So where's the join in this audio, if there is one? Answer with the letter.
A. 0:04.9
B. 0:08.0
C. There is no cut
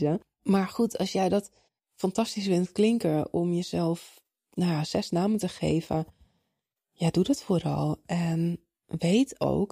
C